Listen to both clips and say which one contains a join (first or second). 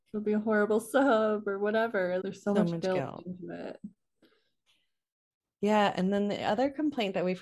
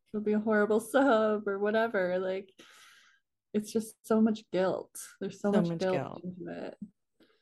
first